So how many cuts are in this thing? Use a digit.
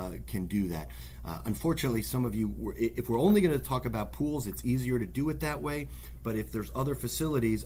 0